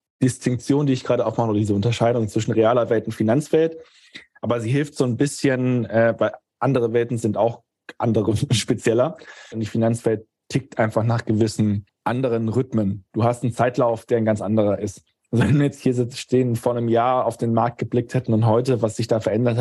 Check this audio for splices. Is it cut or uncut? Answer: cut